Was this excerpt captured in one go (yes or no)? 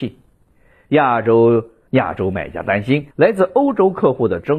no